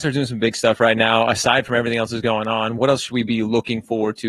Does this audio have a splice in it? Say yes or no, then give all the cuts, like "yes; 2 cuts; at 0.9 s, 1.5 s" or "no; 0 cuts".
no; 0 cuts